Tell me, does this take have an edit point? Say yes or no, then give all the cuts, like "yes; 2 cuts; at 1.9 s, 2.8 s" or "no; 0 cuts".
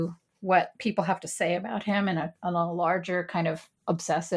no; 0 cuts